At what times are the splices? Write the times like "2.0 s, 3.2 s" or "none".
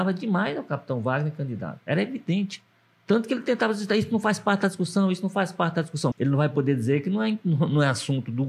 6.1 s

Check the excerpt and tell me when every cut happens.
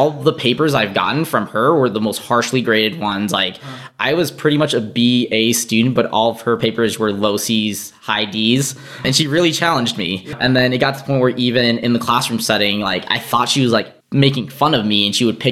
14.0 s

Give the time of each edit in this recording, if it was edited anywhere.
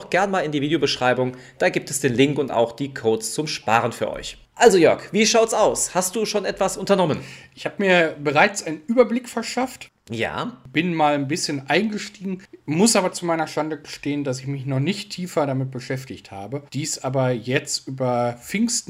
16.7 s

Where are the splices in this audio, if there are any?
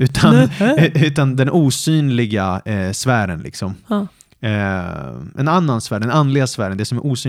none

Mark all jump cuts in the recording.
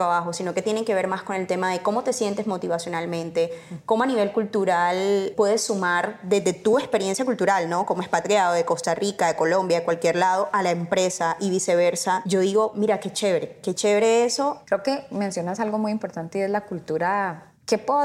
none

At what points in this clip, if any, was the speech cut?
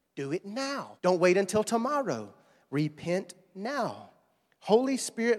1.0 s

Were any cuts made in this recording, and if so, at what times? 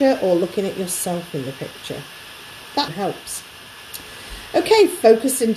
2.9 s

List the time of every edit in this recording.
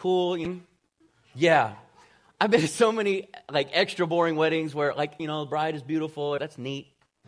5.2 s, 6.4 s

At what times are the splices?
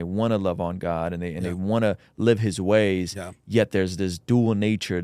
none

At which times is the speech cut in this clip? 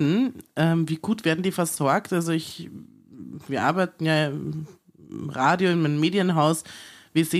none

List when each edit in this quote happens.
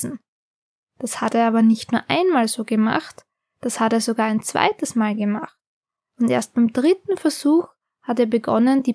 none

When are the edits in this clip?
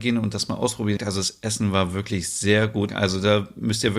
1.0 s, 2.9 s

